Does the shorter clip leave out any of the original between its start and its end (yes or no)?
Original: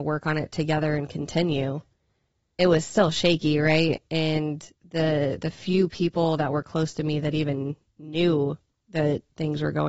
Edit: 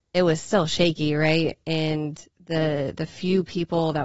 no